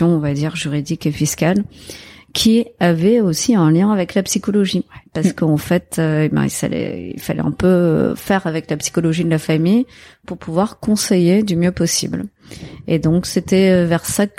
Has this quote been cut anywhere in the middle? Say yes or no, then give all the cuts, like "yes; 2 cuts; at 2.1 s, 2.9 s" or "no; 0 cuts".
no; 0 cuts